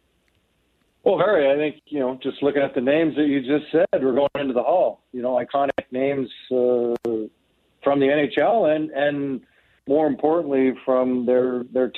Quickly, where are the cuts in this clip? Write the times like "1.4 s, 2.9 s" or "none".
none